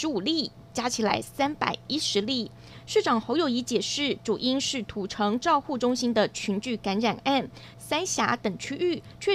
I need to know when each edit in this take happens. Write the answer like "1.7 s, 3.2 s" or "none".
7.7 s

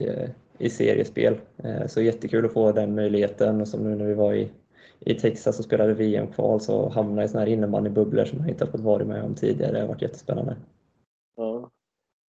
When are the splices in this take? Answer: none

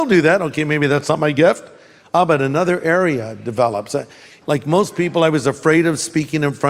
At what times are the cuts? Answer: 4.4 s

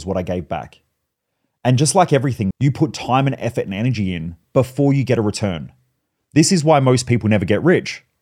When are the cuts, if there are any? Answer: 2.5 s

